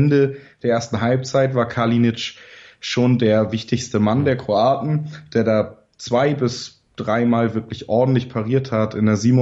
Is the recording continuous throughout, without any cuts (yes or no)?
yes